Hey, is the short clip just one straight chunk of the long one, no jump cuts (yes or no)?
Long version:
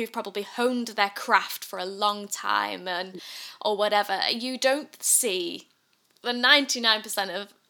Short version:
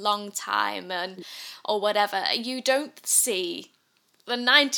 yes